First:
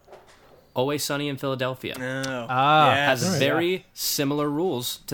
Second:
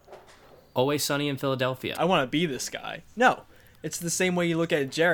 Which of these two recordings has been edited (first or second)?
second